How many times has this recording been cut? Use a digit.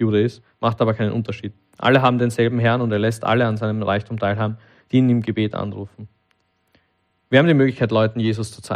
0